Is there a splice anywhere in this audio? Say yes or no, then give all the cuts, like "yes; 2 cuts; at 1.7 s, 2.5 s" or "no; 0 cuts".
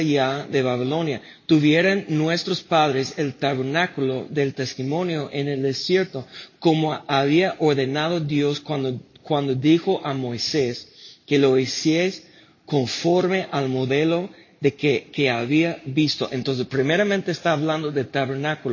no; 0 cuts